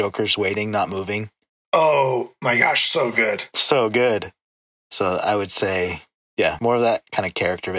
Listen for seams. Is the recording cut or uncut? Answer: cut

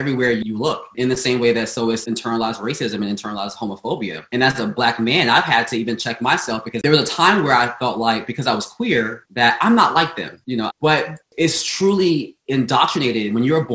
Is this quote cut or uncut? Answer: cut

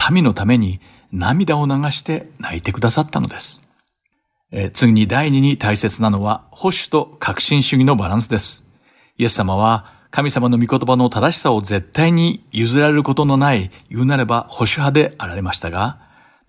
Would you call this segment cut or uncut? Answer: uncut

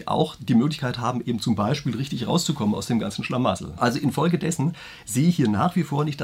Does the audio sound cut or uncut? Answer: cut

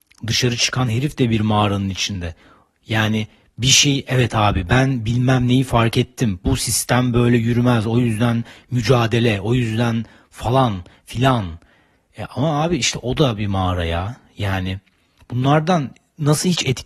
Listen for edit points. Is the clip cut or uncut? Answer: uncut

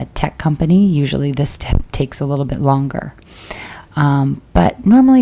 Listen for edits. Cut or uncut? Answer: uncut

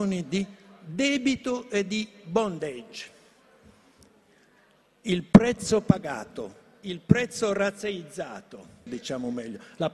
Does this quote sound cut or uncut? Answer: cut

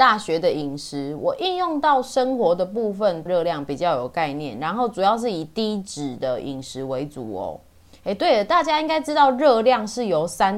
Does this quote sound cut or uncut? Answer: cut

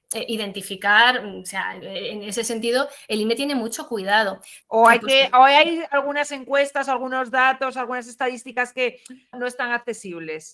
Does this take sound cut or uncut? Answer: cut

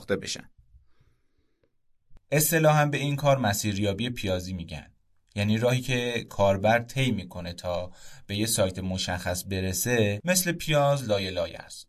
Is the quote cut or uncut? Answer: uncut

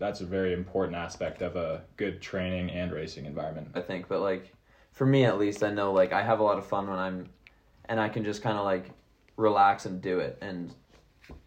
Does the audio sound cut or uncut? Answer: cut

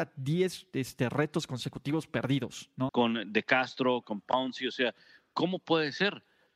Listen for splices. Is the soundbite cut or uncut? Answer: cut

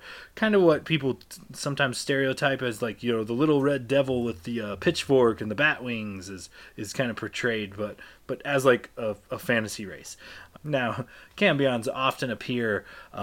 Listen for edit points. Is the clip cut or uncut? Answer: cut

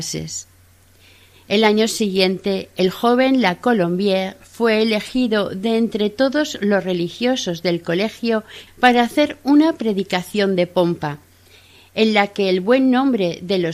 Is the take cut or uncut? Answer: cut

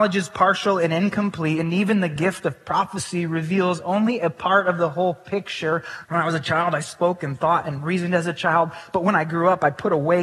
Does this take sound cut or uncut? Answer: cut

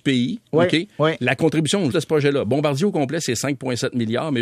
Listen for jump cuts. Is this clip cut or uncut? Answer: cut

